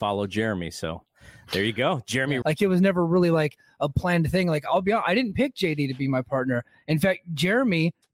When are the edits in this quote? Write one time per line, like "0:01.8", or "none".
0:02.4